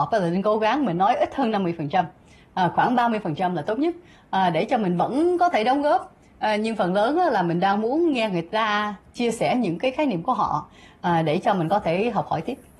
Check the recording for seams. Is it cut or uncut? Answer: uncut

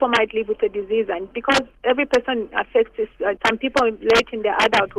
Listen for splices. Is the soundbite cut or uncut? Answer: cut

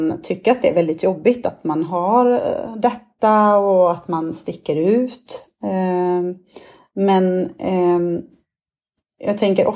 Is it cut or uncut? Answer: uncut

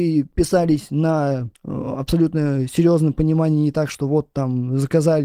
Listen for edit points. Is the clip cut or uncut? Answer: cut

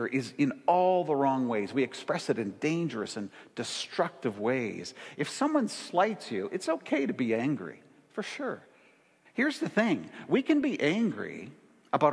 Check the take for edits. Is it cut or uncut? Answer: cut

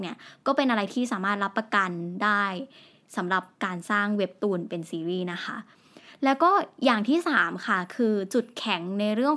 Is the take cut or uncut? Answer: cut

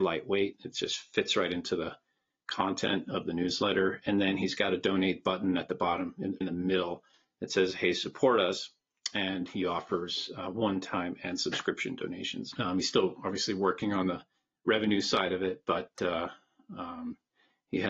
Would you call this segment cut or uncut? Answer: cut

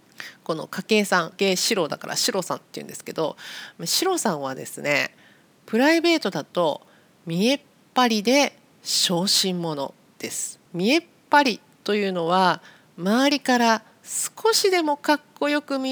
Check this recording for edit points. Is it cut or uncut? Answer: cut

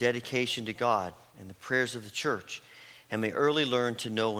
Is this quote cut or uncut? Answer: uncut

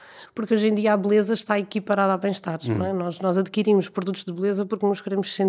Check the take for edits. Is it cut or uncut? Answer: uncut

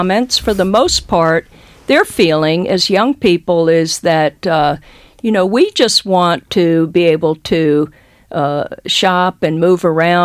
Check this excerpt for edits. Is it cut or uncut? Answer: uncut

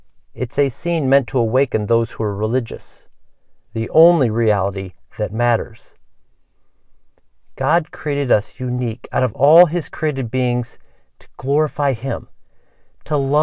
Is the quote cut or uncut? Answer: cut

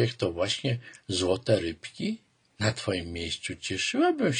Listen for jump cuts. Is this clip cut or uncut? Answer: cut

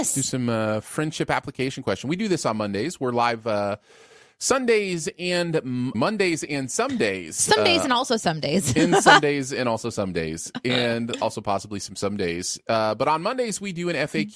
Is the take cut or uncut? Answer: cut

